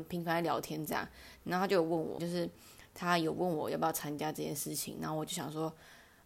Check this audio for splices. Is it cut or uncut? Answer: cut